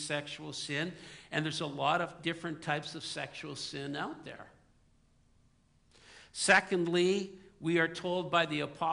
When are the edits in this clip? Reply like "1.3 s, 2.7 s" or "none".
none